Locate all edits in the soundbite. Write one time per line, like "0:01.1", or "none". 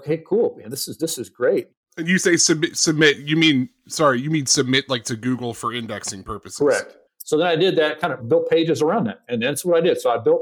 0:07.1
0:08.2

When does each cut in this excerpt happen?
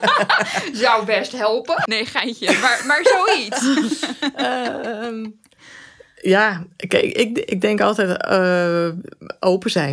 0:01.9

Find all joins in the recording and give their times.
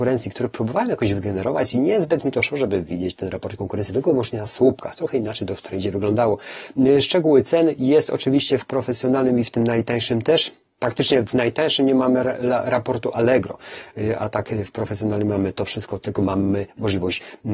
none

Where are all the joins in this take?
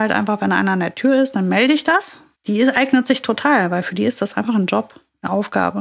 0:02.3

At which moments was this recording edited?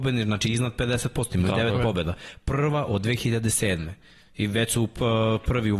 none

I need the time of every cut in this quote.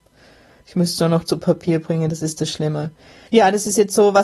0:03.3

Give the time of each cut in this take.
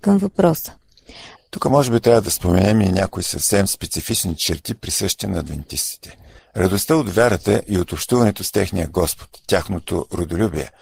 0:01.4
0:06.4

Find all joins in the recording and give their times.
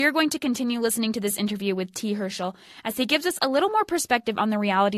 none

